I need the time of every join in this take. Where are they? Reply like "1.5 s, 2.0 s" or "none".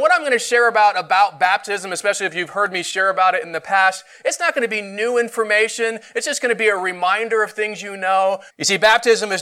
8.5 s